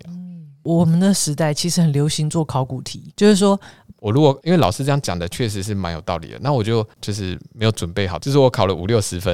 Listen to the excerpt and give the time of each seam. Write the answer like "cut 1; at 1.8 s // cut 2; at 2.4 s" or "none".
cut 1; at 3.9 s // cut 2; at 7.0 s // cut 3; at 8.2 s